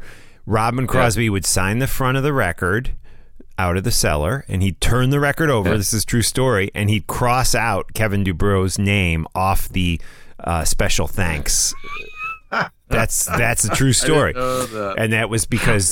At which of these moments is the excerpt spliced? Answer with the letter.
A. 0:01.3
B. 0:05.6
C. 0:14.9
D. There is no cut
D